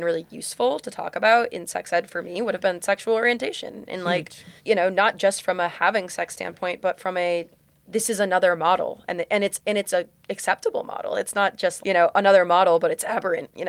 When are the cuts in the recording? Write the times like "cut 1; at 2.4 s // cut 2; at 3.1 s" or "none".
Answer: cut 1; at 4.6 s // cut 2; at 11.8 s